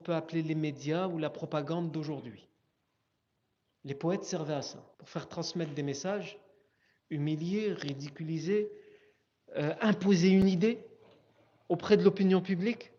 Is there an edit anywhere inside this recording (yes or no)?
yes